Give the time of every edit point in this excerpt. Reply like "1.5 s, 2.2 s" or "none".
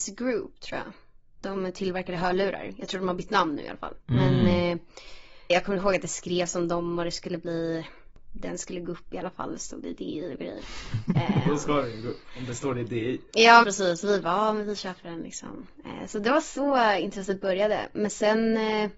5.5 s, 13.6 s